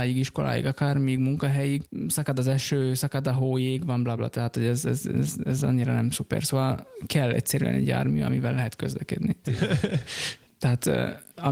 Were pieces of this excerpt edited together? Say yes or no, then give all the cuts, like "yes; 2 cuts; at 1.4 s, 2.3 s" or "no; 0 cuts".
yes; 2 cuts; at 4.2 s, 9.4 s